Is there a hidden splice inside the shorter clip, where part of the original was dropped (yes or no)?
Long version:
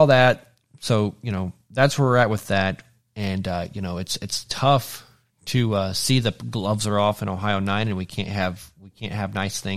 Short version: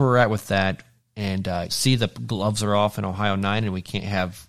yes